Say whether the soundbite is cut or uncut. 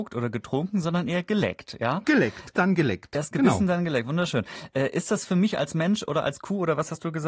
cut